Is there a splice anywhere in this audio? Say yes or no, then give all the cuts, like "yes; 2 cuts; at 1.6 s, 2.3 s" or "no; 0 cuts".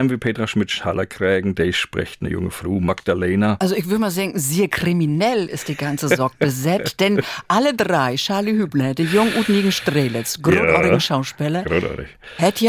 no; 0 cuts